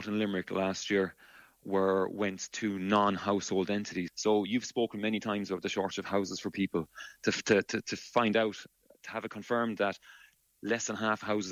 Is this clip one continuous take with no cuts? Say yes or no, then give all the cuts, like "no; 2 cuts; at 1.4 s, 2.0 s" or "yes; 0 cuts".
no; 1 cut; at 4.1 s